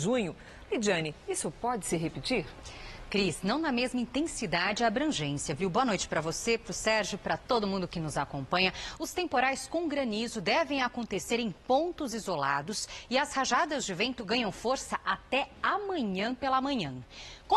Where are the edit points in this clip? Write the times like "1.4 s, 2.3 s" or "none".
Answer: 9.0 s